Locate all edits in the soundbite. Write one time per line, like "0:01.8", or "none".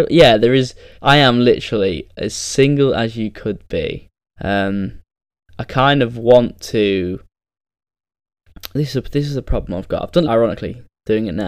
0:00.9
0:04.4
0:10.2